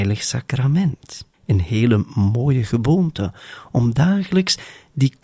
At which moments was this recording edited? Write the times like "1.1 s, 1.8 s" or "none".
1.3 s